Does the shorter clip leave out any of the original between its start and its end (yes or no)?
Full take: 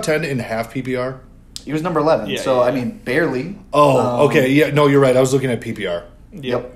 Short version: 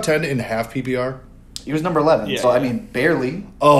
yes